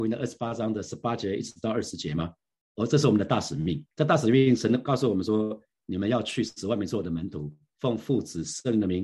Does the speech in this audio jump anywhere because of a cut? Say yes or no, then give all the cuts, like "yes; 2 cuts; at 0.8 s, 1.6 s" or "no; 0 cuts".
yes; 1 cut; at 3.9 s